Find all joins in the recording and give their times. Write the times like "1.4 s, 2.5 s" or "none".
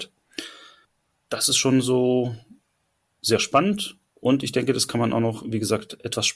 none